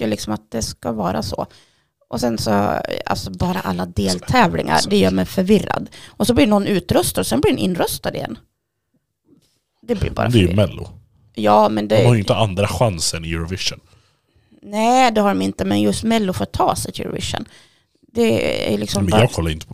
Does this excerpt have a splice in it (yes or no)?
no